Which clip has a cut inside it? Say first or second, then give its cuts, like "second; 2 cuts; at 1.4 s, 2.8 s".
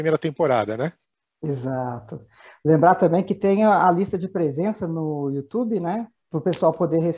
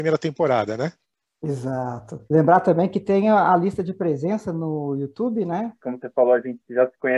second; 2 cuts; at 2.2 s, 5.8 s